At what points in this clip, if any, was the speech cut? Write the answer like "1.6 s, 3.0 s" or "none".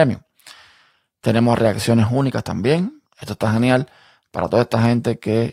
3.0 s